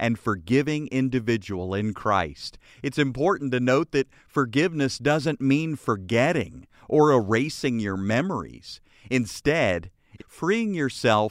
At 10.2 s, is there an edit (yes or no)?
yes